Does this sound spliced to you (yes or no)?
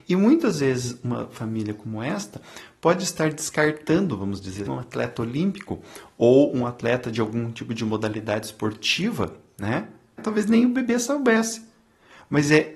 yes